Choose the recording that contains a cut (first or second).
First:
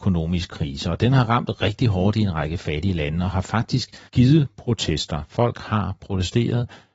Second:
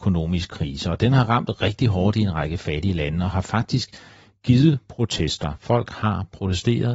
first